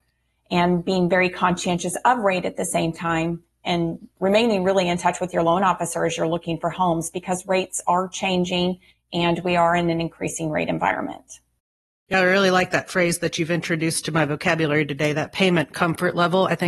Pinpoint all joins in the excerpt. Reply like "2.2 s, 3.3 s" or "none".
none

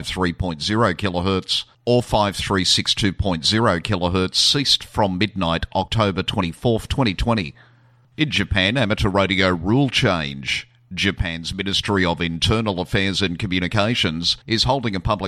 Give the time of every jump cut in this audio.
8.0 s

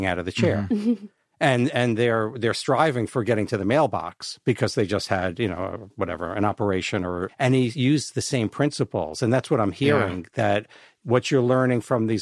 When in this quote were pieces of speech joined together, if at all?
7.3 s

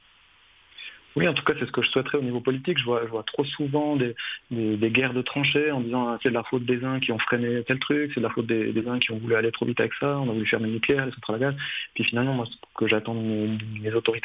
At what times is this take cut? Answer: none

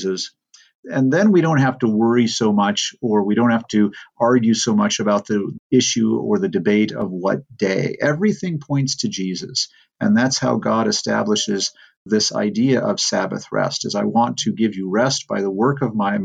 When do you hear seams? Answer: none

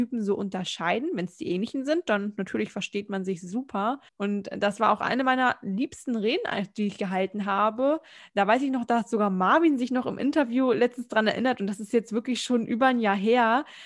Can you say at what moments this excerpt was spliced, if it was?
4.1 s

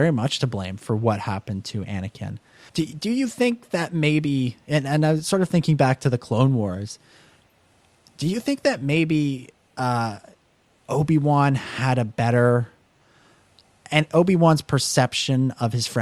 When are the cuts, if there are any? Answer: 2.7 s

